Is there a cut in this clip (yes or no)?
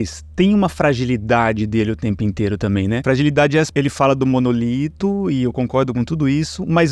yes